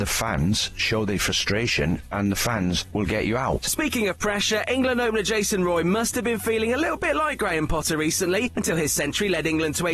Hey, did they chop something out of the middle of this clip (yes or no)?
yes